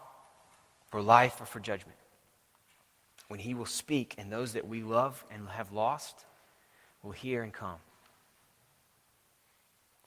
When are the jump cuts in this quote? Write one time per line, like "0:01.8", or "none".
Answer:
none